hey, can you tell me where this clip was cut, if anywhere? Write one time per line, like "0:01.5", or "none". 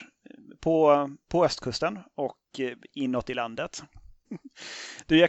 0:04.2